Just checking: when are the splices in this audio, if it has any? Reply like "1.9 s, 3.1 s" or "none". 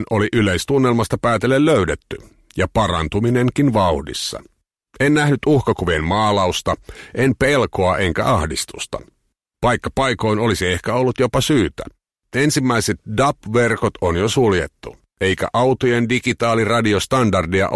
none